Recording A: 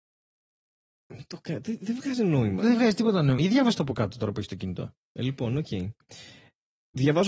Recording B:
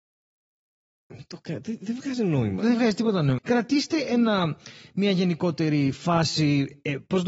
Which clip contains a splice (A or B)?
B